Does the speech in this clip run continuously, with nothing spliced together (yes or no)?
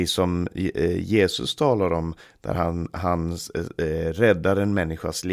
yes